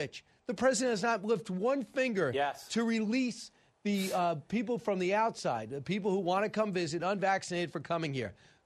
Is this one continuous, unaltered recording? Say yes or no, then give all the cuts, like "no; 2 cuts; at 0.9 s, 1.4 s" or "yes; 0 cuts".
yes; 0 cuts